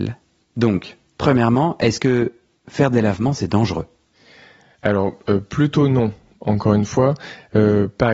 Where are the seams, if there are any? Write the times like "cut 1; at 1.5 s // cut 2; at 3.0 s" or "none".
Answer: none